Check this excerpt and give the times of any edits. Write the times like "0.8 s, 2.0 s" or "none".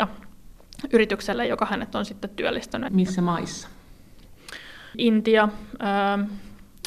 2.9 s